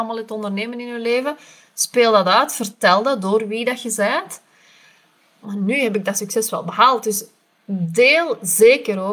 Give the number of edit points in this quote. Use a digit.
1